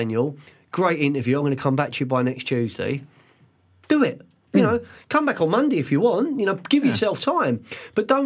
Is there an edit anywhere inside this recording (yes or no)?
no